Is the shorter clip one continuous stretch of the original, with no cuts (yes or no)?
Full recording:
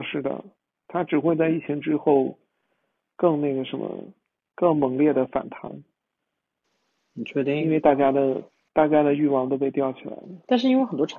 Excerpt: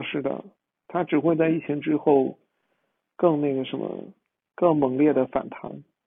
yes